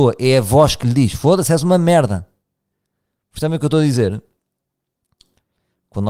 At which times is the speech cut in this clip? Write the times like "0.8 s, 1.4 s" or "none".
none